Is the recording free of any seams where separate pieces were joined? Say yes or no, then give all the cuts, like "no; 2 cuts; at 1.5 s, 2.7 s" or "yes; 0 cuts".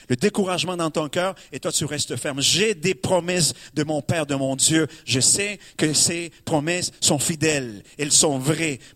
yes; 0 cuts